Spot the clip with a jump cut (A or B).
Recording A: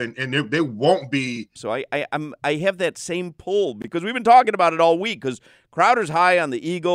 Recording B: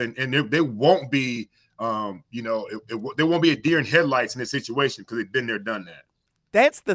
A